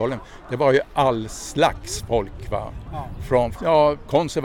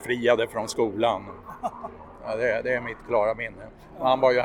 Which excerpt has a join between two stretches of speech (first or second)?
first